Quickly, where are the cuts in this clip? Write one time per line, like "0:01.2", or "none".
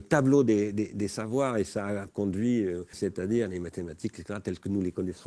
0:02.9
0:04.1